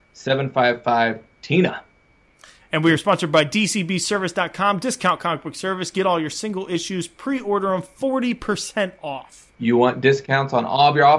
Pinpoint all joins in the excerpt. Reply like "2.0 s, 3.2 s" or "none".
9.5 s